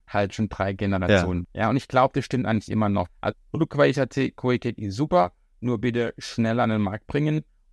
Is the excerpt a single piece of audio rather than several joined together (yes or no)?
no